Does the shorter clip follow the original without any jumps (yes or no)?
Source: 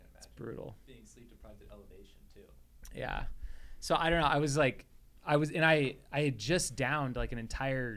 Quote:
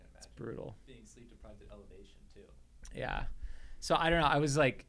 yes